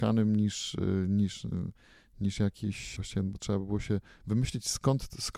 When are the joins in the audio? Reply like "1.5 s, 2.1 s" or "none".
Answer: 3.0 s

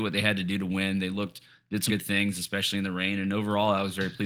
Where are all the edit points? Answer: 1.9 s

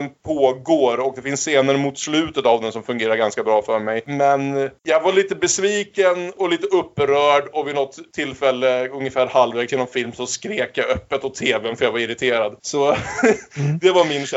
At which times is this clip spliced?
none

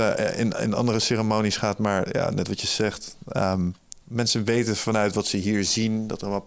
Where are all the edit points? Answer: 4.0 s

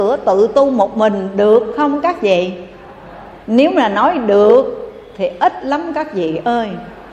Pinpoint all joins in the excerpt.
3.4 s

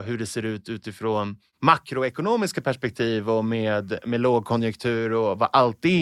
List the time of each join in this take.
none

